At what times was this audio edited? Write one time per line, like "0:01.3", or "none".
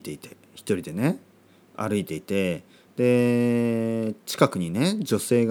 none